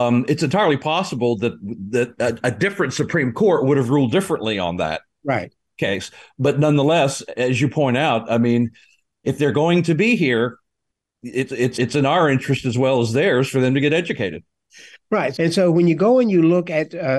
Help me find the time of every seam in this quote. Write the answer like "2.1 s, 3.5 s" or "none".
11.7 s, 15.3 s

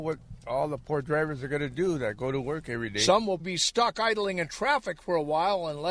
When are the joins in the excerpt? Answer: 3.4 s

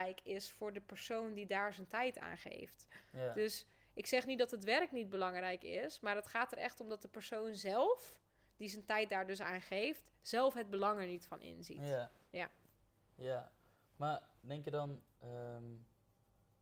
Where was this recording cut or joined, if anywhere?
none

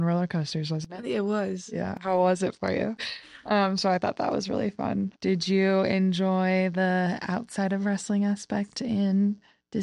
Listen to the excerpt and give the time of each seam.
3.0 s

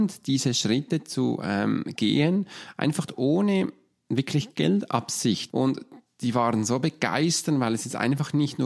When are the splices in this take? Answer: 5.5 s

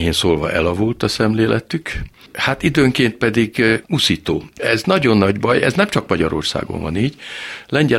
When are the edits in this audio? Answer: 3.8 s

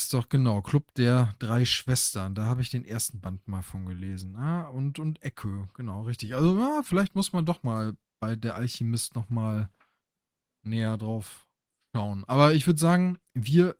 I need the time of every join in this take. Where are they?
none

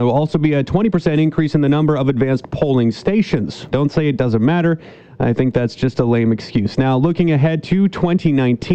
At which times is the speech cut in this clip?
3.7 s

